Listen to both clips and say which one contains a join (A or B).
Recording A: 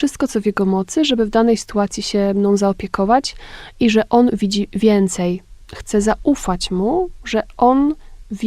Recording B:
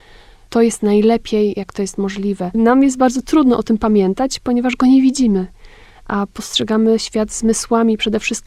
B